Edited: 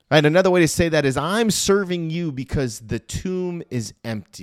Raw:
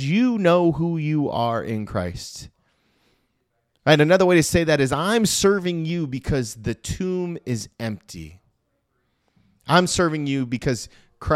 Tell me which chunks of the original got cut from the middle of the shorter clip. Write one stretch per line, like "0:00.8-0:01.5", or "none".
none